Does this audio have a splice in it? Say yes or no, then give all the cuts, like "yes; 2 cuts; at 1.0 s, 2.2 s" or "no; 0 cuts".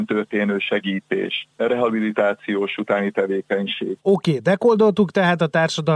yes; 1 cut; at 4.0 s